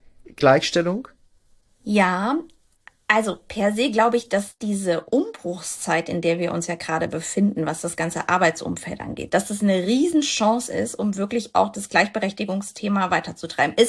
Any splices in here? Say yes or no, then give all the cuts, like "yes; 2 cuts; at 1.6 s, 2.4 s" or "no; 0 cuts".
no; 0 cuts